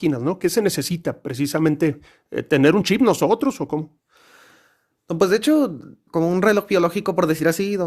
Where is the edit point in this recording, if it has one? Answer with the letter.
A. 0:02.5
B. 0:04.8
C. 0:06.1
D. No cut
C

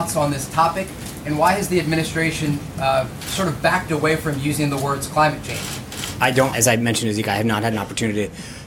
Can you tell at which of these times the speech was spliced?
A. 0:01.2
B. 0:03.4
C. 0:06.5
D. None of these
C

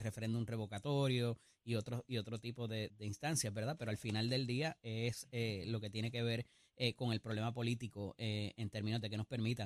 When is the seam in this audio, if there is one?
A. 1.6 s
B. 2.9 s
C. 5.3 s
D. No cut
B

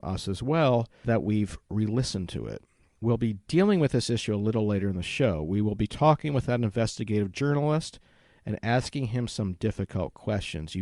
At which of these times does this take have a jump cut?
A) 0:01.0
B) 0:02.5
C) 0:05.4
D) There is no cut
A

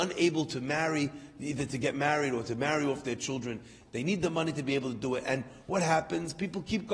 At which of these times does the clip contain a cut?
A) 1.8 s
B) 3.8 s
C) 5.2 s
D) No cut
D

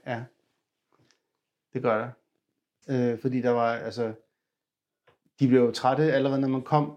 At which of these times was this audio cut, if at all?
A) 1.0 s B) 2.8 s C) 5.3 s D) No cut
B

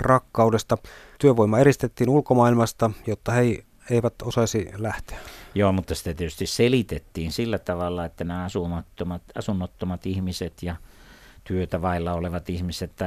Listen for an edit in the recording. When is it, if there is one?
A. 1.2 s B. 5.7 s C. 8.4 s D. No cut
A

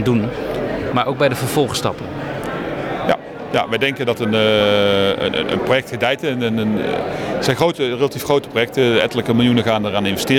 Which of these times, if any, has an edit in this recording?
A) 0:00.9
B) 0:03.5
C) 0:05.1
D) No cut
A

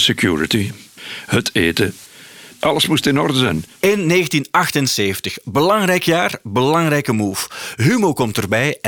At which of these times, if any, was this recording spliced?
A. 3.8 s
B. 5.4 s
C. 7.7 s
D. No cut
A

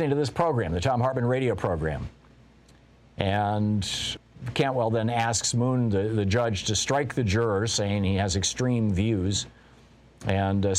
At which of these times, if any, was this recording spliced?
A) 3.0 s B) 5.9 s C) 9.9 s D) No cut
D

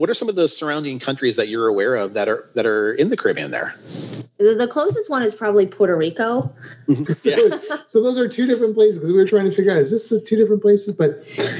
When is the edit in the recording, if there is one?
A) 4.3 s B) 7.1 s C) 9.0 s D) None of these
B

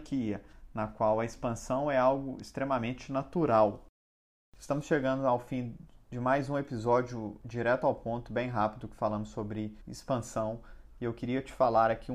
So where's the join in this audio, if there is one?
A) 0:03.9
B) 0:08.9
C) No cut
C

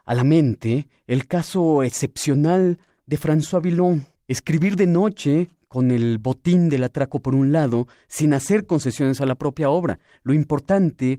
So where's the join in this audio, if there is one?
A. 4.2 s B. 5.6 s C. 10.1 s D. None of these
A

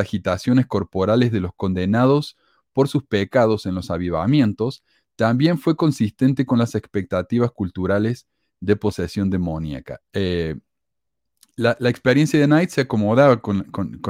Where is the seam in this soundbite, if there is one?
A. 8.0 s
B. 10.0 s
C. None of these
B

